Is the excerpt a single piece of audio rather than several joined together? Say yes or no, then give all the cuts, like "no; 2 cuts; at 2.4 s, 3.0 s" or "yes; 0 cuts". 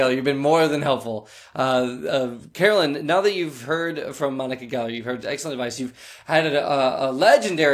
yes; 0 cuts